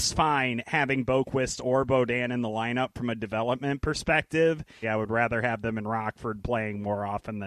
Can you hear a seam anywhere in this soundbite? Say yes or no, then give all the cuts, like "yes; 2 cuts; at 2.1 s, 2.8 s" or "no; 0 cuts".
yes; 1 cut; at 4.8 s